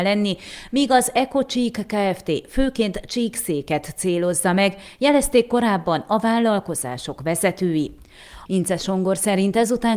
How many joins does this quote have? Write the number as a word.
one